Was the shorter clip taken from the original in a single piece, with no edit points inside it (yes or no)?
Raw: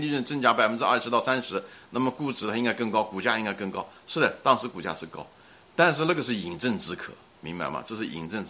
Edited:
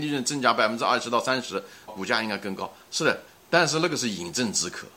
no